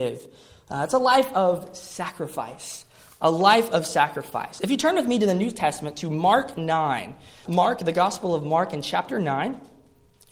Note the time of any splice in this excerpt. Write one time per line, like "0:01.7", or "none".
0:07.4